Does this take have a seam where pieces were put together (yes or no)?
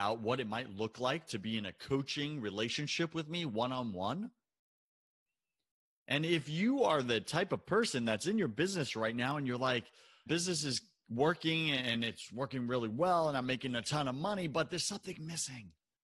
yes